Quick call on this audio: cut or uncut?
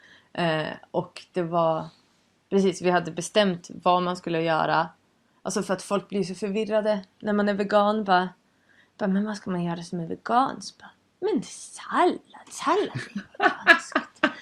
uncut